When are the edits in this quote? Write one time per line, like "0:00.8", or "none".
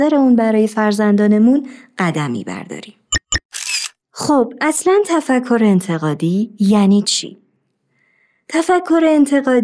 none